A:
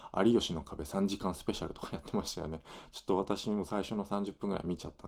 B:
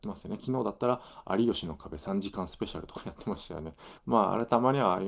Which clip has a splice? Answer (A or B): B